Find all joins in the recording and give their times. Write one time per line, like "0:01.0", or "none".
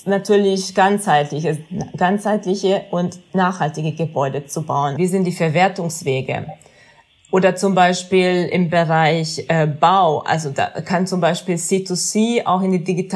0:05.0